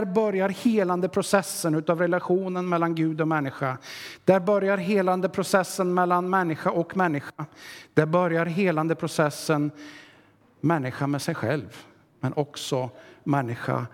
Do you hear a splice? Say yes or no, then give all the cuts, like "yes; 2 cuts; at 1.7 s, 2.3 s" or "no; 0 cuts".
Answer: no; 0 cuts